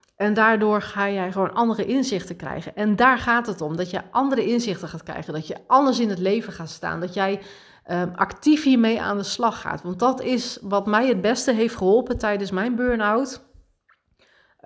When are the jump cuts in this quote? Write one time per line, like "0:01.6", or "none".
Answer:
none